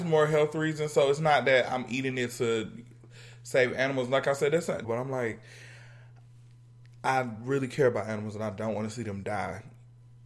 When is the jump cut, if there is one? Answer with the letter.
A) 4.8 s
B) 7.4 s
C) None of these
A